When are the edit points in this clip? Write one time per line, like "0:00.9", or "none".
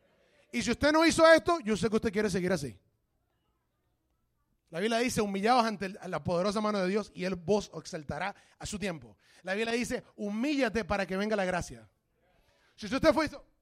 none